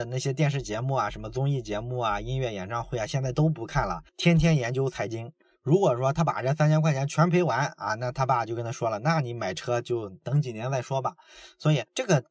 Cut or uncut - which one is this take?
uncut